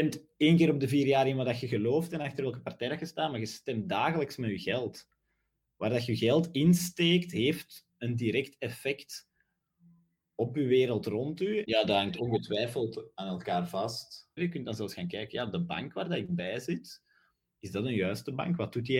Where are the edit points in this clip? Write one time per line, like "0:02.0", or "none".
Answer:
0:11.6
0:14.4